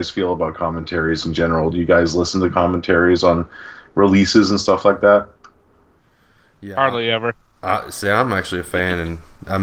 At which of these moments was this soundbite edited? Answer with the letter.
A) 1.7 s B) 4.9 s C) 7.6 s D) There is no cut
D